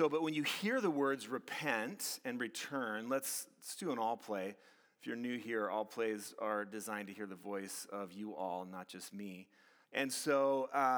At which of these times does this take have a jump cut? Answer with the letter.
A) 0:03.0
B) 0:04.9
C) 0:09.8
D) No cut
C